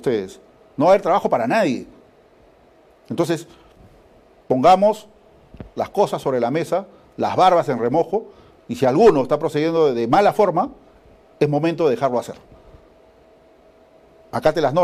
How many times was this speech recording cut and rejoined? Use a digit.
0